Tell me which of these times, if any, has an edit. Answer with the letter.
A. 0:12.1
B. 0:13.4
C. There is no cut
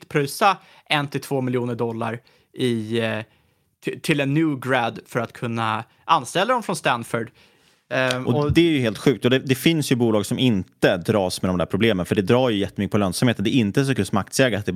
C